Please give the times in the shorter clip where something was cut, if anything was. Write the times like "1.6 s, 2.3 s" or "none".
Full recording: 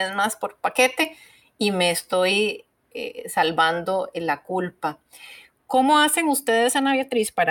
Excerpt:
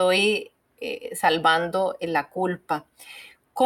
none